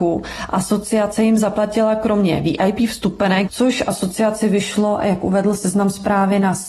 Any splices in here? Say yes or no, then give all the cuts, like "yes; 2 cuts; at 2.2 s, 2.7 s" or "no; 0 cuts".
yes; 1 cut; at 3.5 s